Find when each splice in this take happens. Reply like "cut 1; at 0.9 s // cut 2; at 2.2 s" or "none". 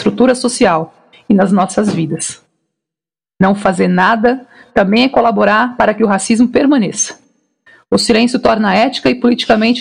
none